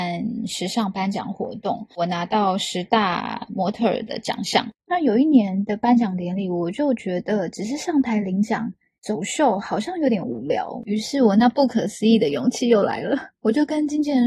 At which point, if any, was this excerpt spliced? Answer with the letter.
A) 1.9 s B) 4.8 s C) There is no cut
C